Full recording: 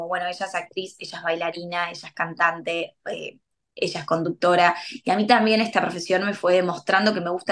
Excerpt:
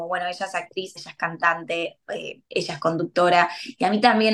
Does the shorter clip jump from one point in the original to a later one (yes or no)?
yes